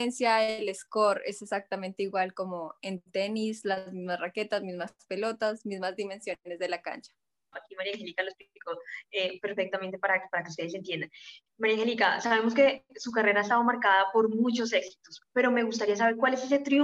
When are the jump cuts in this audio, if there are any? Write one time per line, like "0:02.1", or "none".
0:07.5